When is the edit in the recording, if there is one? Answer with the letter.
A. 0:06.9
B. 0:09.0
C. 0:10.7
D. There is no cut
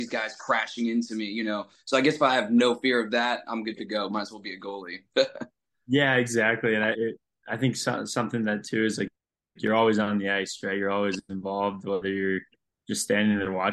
A